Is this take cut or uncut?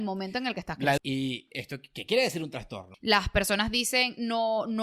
cut